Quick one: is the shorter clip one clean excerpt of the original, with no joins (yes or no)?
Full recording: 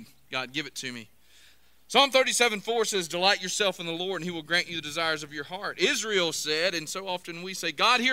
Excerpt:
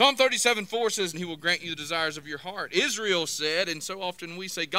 no